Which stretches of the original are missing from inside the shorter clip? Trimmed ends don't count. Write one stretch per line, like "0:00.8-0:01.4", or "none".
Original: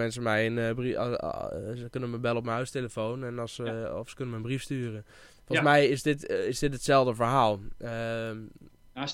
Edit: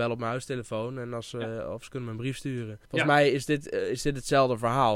0:05.1-0:05.4